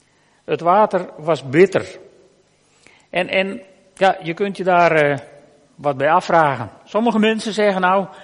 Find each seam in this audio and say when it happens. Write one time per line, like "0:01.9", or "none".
none